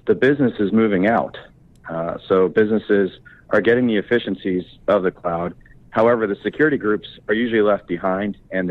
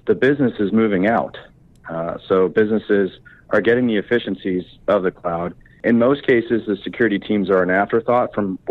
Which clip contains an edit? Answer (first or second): second